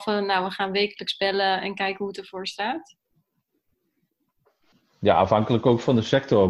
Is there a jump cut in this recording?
no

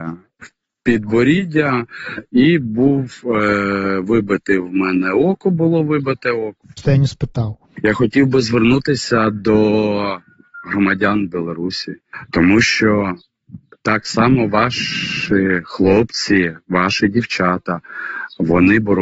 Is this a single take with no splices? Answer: no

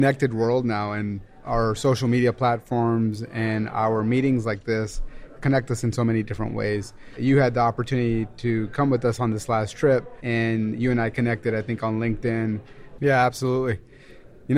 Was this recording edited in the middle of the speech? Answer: yes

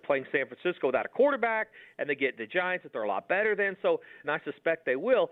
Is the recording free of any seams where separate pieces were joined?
no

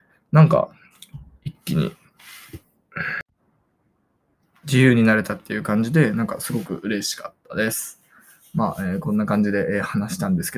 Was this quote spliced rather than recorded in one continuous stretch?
no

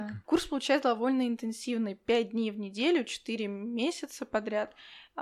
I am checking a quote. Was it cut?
no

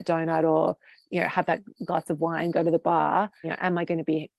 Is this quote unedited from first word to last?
no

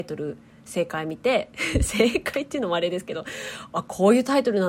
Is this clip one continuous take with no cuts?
yes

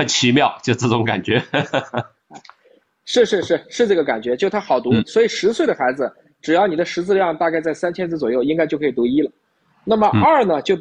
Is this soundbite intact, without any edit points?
yes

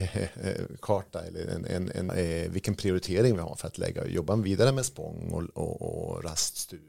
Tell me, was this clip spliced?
yes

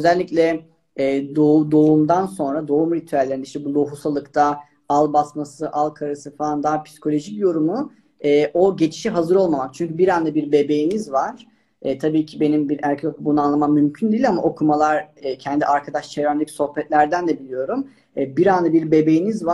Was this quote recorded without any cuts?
yes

